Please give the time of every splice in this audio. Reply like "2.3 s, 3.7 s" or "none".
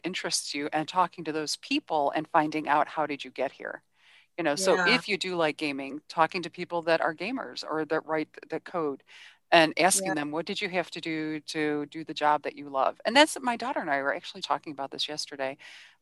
14.4 s